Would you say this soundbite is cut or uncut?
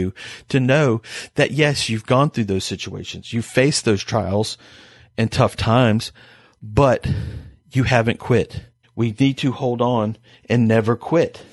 cut